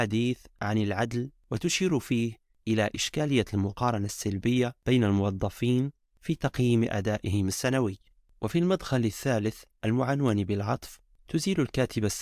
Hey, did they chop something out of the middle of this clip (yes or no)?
no